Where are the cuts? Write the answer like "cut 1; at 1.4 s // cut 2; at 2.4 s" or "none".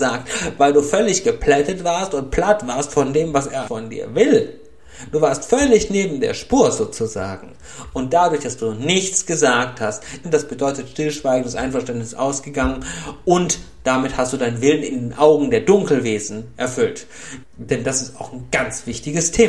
cut 1; at 3.7 s // cut 2; at 10.2 s // cut 3; at 17.4 s